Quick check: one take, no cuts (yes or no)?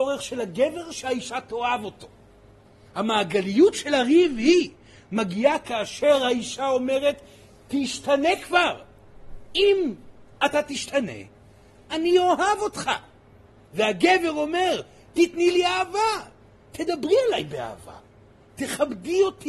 yes